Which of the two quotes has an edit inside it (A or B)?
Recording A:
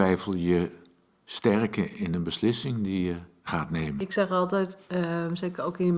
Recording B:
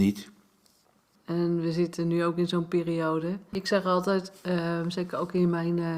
B